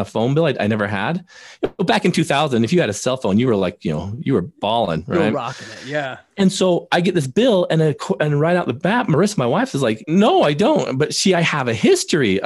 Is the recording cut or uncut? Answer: cut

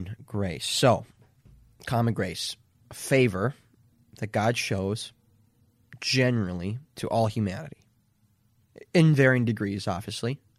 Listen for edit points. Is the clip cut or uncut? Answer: cut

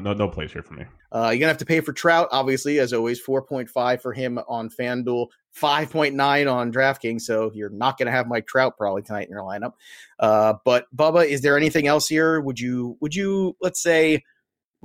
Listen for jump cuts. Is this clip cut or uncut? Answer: cut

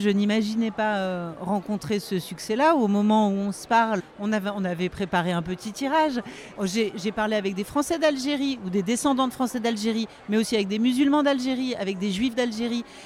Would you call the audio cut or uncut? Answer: cut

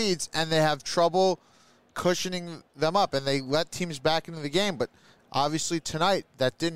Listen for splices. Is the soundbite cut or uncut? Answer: cut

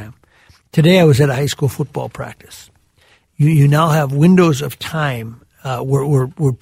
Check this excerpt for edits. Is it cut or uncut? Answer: uncut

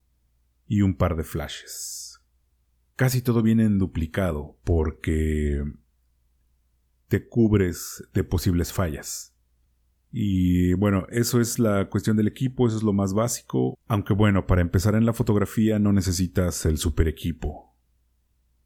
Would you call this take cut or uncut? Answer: cut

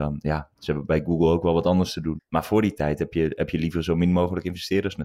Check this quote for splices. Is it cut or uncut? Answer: cut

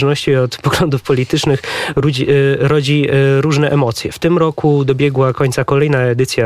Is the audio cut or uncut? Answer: uncut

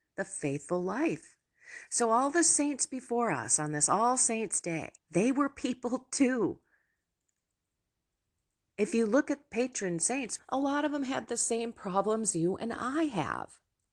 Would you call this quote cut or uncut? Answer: cut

